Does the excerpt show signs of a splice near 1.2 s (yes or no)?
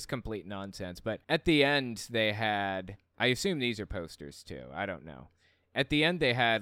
yes